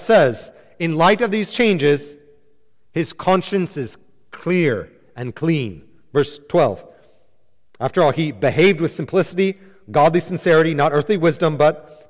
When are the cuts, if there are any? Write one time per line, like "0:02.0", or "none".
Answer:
none